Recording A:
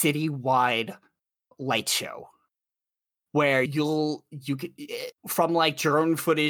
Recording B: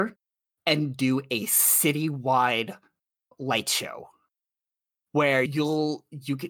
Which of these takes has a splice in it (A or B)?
A